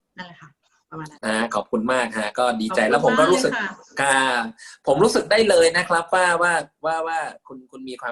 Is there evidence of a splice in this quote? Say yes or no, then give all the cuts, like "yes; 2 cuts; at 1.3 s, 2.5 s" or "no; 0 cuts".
yes; 1 cut; at 1.2 s